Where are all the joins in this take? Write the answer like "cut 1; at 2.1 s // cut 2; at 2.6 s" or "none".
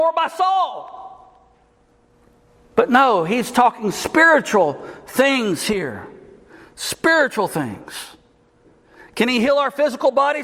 none